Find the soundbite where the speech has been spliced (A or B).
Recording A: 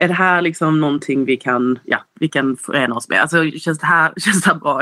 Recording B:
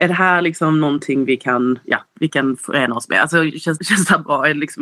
B